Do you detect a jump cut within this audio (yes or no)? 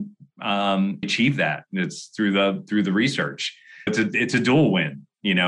yes